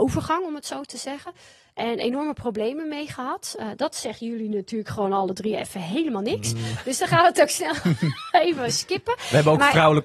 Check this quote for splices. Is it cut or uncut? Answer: uncut